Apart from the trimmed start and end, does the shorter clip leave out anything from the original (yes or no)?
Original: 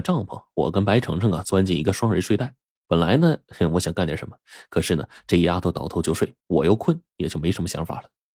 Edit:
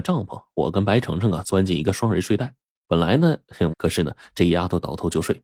yes